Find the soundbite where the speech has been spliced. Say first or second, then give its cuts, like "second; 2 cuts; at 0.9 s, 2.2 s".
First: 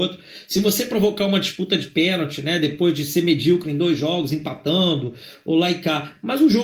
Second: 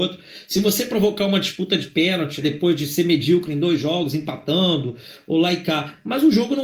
second; 1 cut; at 2.4 s